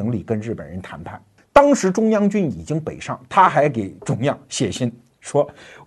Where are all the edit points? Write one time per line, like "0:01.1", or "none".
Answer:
0:01.4